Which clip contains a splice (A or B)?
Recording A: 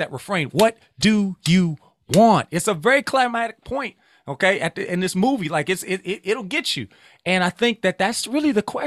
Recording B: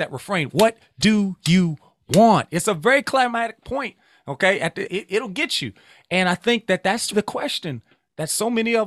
B